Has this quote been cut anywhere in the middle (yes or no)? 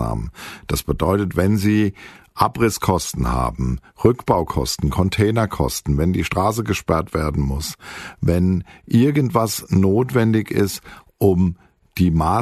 no